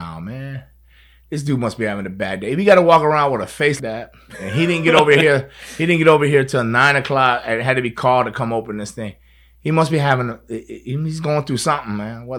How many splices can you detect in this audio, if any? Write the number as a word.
one